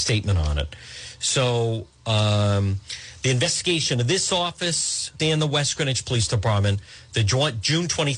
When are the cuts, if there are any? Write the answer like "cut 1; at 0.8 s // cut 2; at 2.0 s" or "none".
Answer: cut 1; at 5.2 s

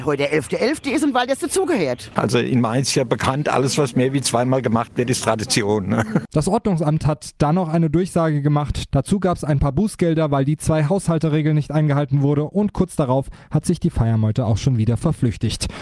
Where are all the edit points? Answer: none

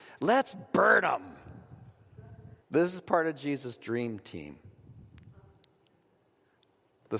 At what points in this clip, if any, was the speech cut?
cut 1; at 2.6 s

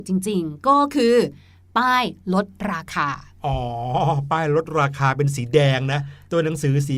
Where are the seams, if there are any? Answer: none

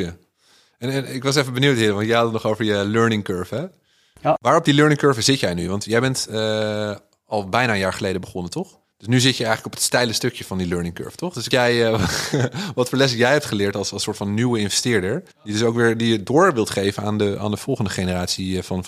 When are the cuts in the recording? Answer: cut 1; at 11.5 s // cut 2; at 15.3 s

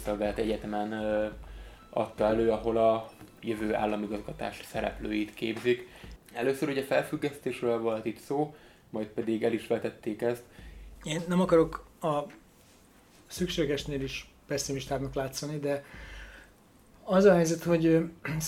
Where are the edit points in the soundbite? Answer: cut 1; at 6.2 s // cut 2; at 11.0 s

